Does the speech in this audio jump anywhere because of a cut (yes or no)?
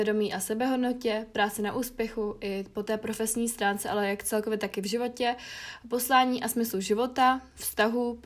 no